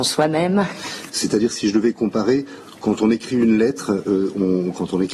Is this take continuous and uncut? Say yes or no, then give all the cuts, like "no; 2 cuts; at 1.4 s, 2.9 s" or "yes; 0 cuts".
no; 1 cut; at 1.1 s